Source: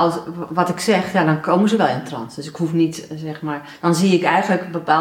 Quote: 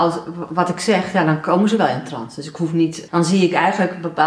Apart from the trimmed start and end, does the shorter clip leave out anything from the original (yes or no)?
yes